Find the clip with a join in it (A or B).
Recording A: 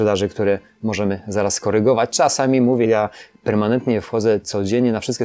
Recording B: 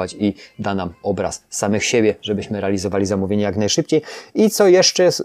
A